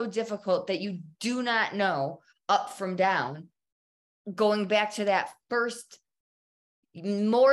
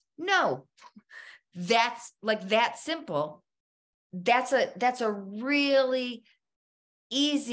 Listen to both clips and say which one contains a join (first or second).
second